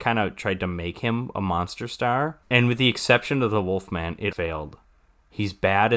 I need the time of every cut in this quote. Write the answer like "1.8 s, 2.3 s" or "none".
2.4 s, 4.3 s